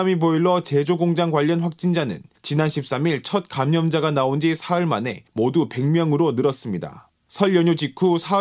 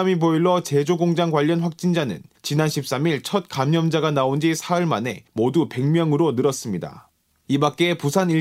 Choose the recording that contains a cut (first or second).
first